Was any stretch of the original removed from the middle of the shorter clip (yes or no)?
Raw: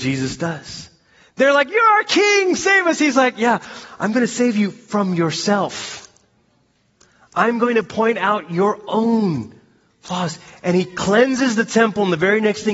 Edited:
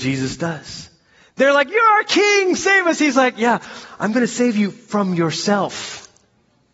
no